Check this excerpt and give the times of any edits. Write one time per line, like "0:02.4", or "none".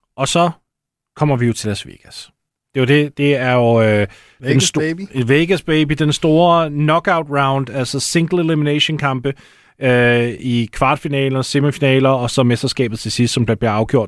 none